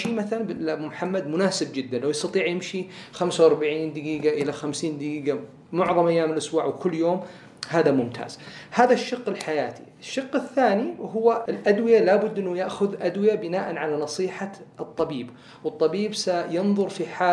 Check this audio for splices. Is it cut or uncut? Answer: cut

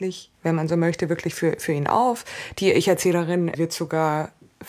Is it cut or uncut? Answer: cut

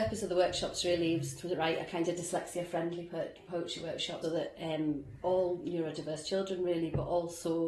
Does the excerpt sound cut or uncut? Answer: cut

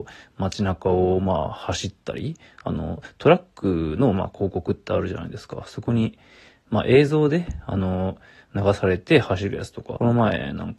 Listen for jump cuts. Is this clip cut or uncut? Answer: uncut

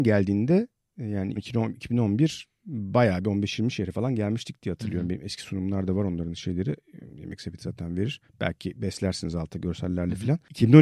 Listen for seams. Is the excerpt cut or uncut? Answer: cut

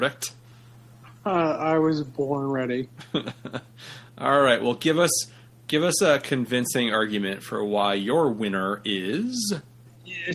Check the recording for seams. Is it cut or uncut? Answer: uncut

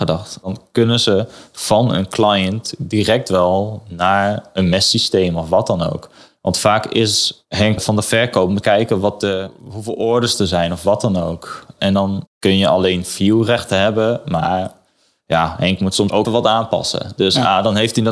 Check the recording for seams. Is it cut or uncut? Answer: cut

